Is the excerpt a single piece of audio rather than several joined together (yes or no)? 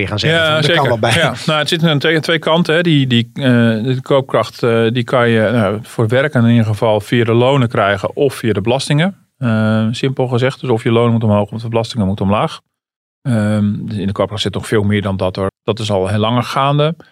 no